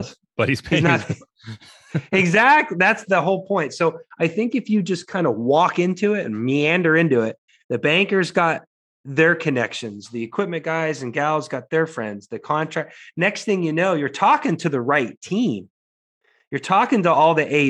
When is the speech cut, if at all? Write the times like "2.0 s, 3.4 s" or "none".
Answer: none